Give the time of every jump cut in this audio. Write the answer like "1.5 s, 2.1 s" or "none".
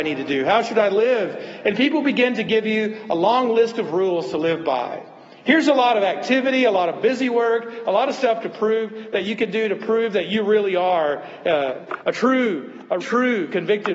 13.0 s